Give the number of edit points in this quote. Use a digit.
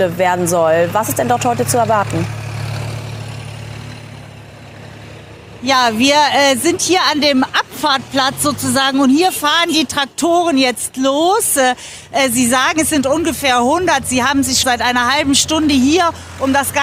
1